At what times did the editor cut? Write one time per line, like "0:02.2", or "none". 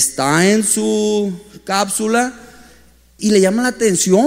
0:03.2

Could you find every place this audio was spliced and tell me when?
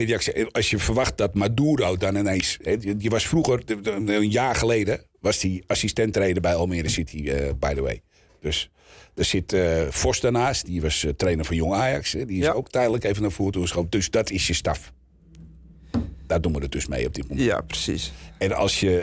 none

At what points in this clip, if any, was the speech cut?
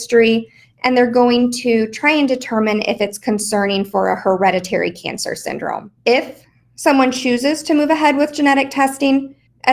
0:06.0

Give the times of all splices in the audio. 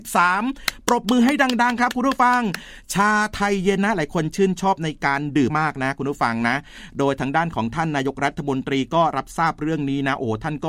0:05.5

